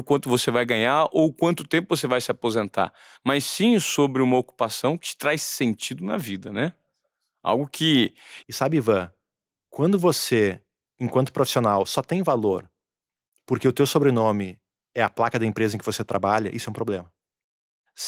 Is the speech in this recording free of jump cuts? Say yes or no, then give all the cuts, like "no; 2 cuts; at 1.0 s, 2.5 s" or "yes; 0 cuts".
no; 1 cut; at 8.4 s